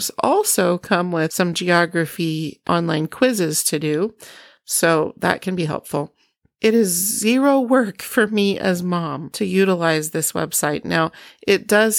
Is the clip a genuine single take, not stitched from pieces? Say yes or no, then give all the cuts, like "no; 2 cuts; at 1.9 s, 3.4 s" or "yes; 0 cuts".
yes; 0 cuts